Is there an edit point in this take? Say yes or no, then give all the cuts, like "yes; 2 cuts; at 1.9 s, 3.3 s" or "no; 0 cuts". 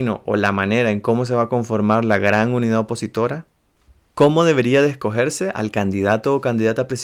no; 0 cuts